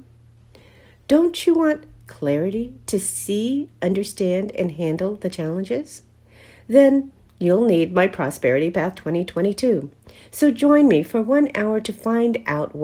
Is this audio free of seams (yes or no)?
yes